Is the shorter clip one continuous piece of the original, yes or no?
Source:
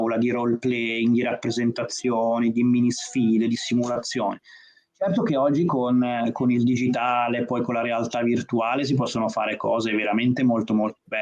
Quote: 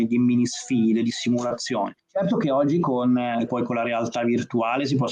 no